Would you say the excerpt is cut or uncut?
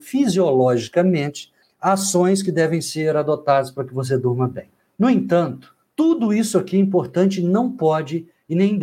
uncut